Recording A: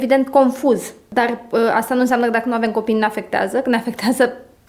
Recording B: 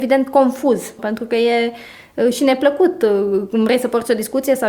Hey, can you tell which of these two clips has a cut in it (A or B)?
B